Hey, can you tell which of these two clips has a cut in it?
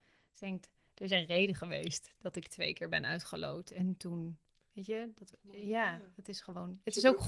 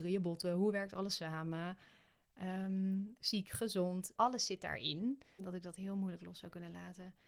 second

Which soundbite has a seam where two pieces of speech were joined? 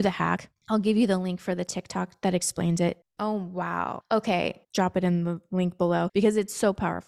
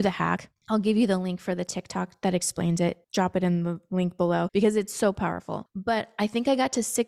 first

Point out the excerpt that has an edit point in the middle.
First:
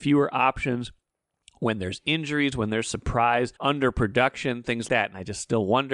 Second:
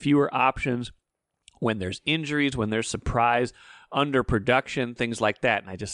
first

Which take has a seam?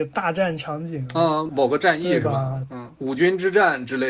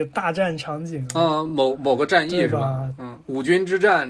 first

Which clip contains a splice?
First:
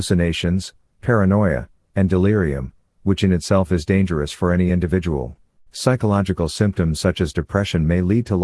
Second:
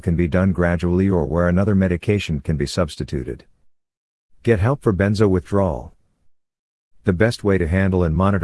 first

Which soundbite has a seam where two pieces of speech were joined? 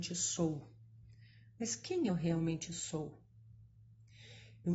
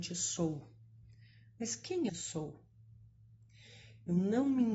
second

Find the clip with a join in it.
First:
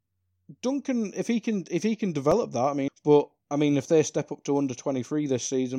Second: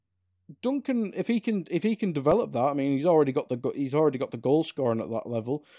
first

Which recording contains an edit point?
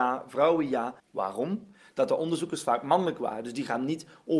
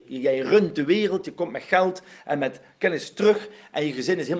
first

